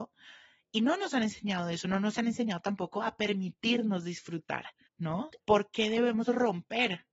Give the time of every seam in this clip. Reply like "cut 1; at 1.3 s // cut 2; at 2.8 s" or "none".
cut 1; at 5.4 s